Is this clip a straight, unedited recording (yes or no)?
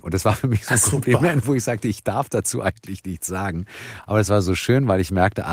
yes